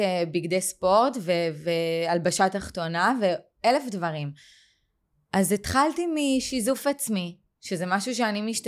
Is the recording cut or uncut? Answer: uncut